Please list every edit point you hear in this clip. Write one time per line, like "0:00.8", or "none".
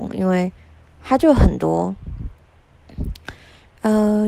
none